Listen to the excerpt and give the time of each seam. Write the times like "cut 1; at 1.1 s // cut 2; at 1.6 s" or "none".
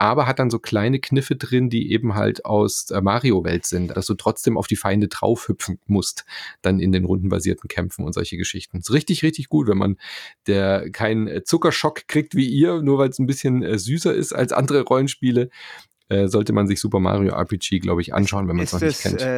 cut 1; at 3.9 s